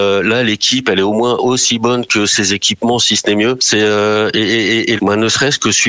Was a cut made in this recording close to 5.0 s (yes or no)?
yes